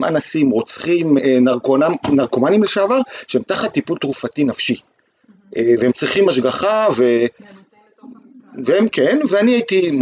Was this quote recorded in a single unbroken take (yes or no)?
no